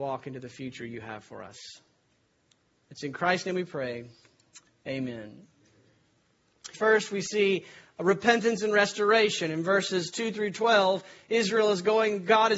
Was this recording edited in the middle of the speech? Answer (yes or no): yes